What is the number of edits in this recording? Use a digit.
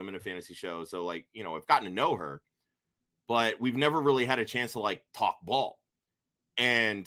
0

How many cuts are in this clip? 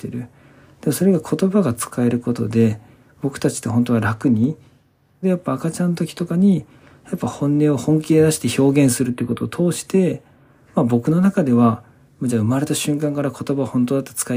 1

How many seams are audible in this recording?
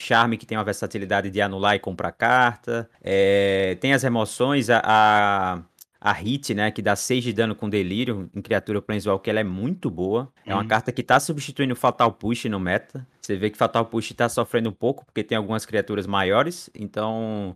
0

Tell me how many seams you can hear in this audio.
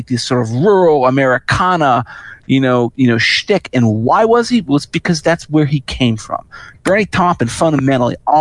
1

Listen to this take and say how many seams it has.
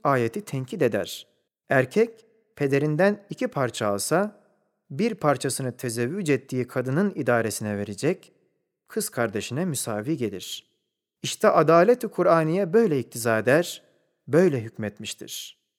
1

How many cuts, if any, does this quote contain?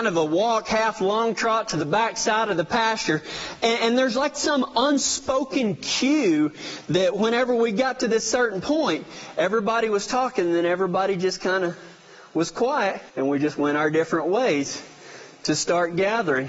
1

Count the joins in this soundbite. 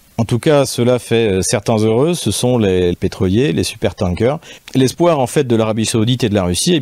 2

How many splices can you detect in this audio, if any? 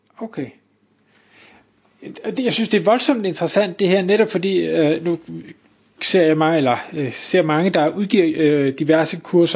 0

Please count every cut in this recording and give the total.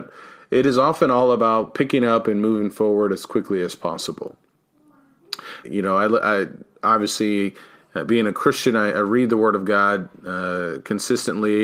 1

